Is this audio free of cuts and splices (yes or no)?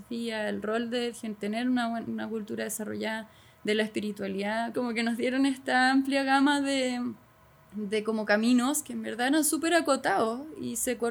no